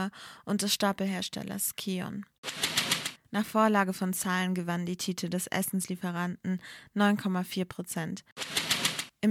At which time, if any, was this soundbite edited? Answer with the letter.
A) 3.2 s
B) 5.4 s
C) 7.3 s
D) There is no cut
A